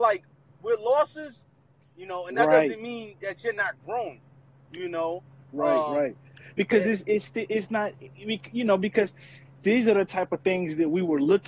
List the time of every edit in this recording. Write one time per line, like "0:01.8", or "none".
0:01.8